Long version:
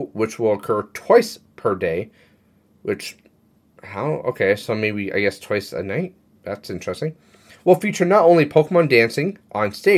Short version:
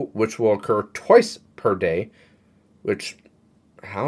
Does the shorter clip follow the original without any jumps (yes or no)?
yes